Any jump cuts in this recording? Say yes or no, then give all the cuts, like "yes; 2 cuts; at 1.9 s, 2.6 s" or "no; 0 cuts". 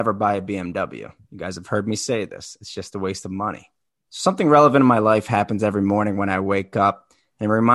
yes; 1 cut; at 4.1 s